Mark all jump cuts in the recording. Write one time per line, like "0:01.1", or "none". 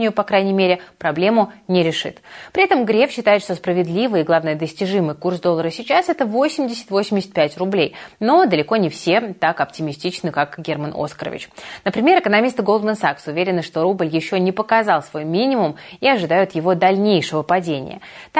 none